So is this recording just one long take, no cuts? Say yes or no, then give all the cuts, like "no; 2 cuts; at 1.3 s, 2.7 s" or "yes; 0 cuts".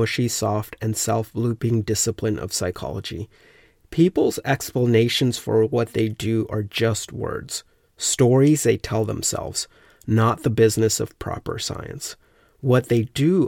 yes; 0 cuts